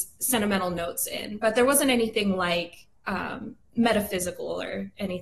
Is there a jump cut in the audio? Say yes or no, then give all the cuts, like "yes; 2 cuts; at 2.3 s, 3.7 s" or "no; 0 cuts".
no; 0 cuts